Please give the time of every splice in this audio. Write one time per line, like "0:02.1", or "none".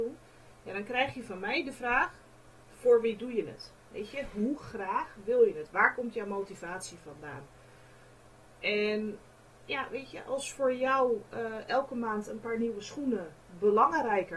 none